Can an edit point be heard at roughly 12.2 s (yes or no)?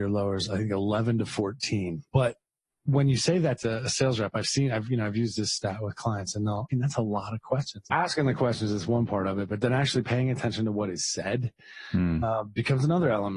no